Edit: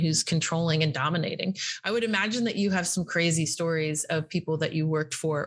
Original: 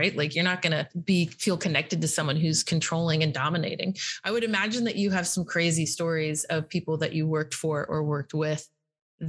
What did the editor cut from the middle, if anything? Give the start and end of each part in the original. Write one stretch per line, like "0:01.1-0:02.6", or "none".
none

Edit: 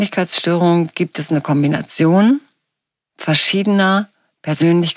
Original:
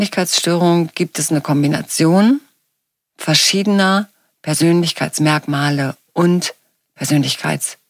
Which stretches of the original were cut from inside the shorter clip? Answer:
none

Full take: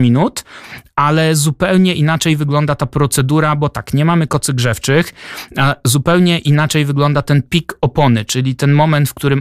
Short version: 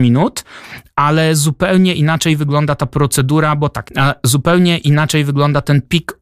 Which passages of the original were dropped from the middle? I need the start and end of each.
0:03.9-0:05.5

